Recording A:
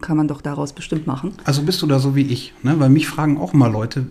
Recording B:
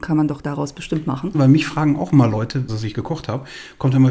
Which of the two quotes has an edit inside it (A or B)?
B